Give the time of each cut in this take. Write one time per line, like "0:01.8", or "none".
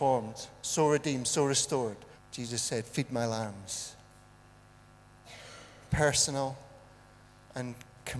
0:02.1